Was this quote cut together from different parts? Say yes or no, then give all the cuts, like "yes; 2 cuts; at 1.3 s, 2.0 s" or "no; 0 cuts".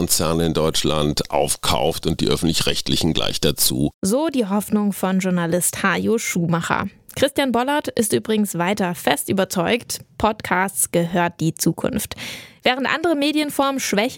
yes; 1 cut; at 3.9 s